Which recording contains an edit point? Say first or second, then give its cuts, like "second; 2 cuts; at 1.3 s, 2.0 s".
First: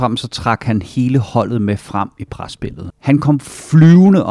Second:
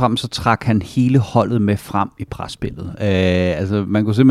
first; 1 cut; at 2.9 s